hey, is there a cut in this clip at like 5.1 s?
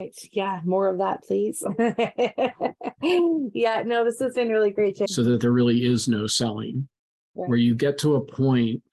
yes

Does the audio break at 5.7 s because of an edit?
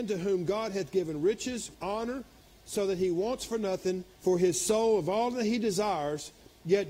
no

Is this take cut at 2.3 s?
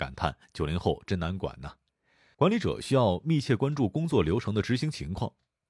yes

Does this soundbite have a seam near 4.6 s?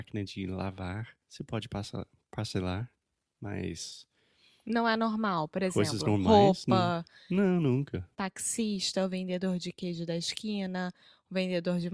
no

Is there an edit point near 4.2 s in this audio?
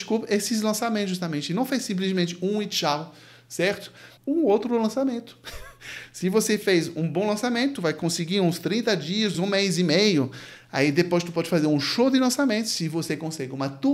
yes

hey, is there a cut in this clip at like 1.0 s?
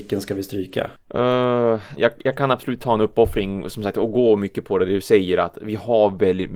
yes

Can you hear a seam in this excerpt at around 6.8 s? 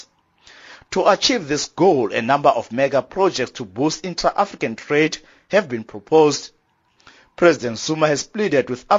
no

